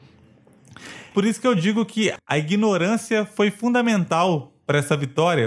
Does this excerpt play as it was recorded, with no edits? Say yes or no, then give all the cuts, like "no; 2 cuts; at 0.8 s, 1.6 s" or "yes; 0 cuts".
no; 1 cut; at 1.1 s